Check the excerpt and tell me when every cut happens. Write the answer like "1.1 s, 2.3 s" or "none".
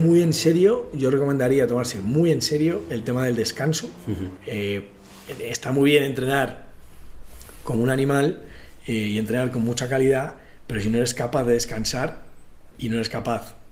4.4 s, 12.7 s